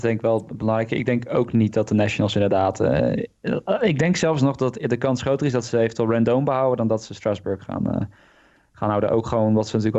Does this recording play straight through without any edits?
yes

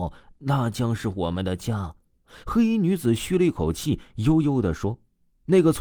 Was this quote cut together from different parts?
no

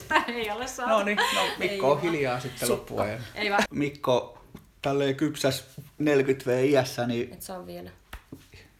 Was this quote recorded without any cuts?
no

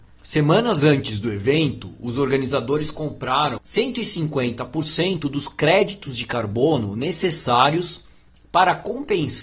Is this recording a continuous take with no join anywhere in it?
yes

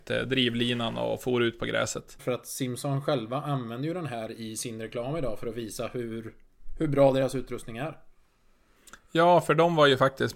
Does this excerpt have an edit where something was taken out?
yes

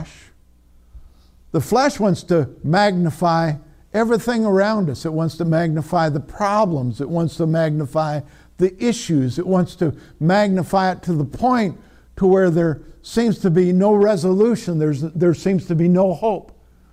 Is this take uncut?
yes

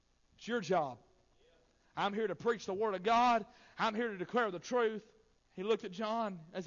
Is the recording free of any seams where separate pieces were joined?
no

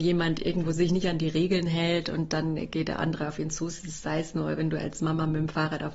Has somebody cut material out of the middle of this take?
no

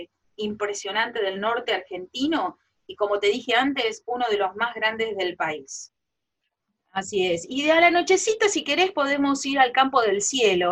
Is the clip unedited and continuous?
yes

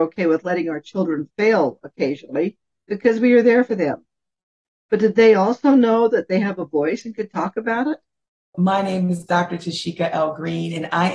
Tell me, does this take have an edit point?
yes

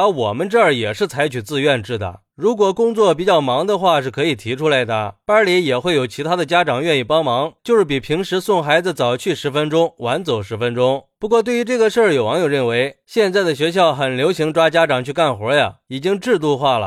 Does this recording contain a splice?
yes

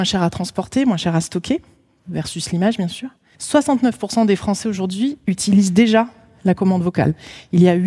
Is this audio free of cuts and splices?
no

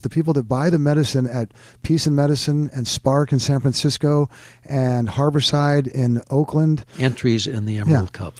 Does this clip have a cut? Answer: yes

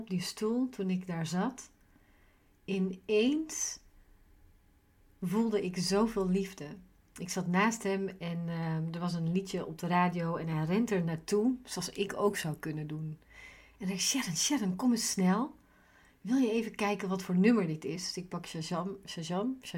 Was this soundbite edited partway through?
no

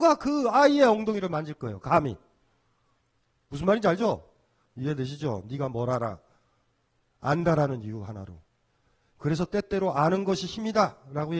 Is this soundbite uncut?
no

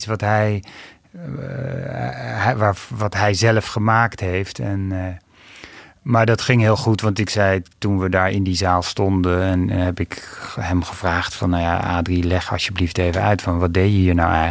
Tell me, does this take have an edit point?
no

